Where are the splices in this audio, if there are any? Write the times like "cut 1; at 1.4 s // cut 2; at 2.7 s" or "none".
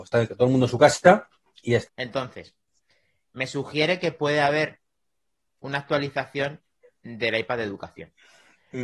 cut 1; at 1.9 s

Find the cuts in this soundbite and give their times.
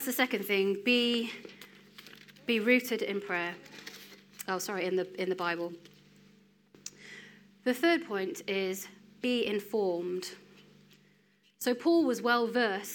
none

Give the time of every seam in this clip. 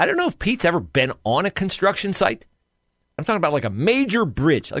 cut 1; at 3.2 s

